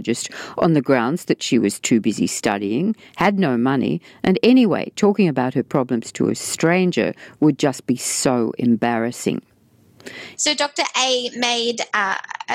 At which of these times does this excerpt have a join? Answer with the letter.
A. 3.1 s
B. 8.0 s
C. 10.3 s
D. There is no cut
C